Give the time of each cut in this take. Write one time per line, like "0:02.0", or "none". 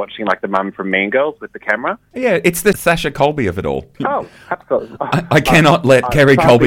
0:02.1